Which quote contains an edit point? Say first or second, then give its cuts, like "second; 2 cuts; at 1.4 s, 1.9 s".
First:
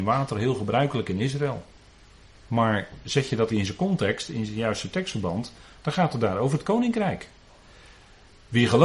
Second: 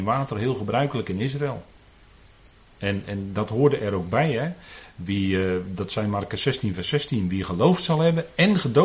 first; 2 cuts; at 2.3 s, 3.5 s